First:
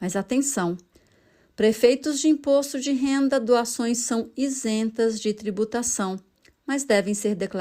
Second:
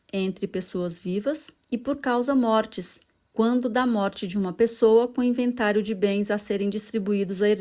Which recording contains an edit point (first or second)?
second